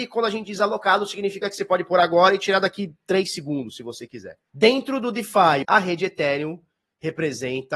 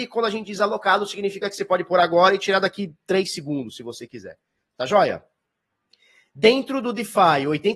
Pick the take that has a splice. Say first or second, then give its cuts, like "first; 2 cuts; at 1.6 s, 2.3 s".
first; 2 cuts; at 4.5 s, 5.6 s